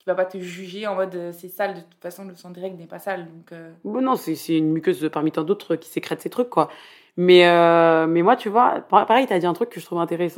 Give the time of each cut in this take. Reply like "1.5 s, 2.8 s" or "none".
none